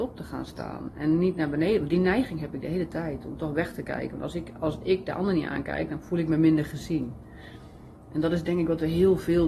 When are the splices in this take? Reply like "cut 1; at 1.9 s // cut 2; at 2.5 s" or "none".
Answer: none